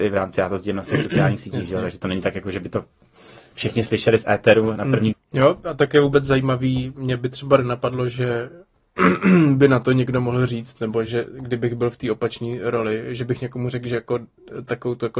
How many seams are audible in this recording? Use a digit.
1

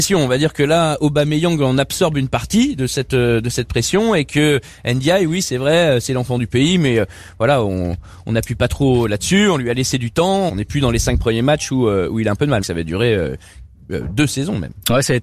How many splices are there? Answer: 2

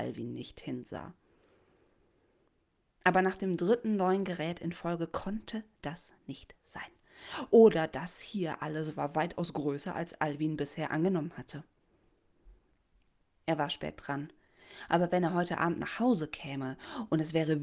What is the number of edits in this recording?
0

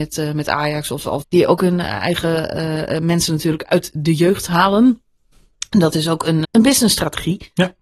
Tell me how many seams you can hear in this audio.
2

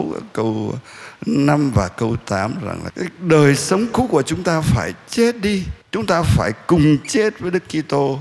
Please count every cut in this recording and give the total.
2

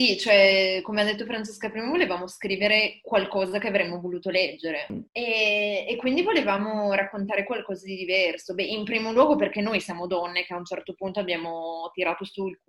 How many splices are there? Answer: 1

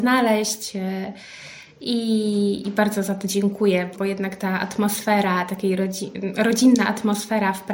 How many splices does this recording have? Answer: 1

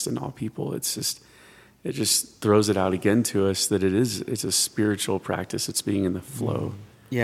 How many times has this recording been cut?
0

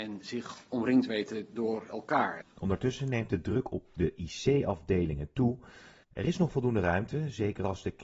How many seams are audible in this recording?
2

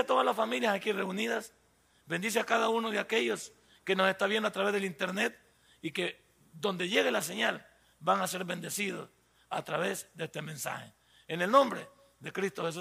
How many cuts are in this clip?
0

